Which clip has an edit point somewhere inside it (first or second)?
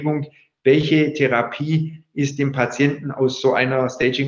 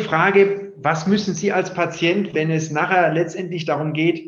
second